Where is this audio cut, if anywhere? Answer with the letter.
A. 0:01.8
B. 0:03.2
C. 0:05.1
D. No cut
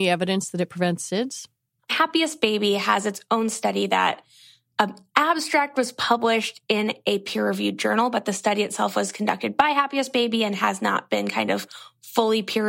A